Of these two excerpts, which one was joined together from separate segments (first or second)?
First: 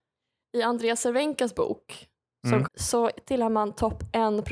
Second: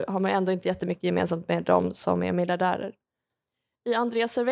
first